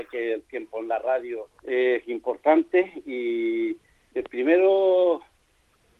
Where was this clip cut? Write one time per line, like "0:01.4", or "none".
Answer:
0:01.6